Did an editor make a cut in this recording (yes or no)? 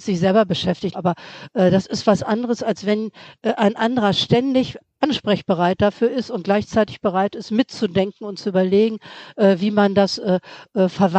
yes